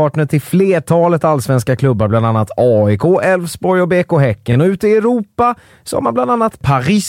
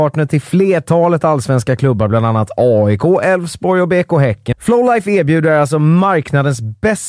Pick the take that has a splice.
second; 1 cut; at 4.5 s

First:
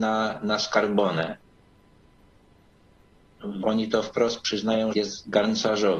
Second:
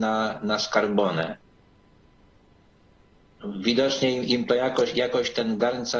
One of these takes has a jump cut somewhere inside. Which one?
first; 2 cuts; at 3.6 s, 4.9 s

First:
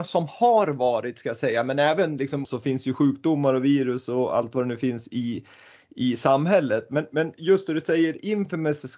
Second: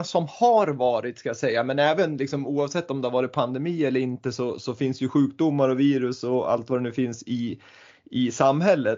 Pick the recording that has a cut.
first; 1 cut; at 2.4 s

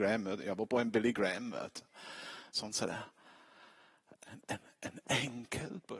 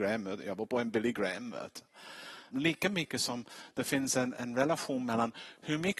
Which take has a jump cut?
second; 1 cut; at 2.5 s

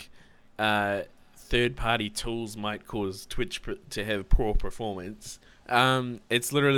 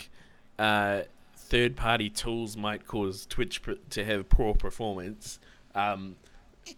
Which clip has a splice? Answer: first; 1 cut; at 5.6 s

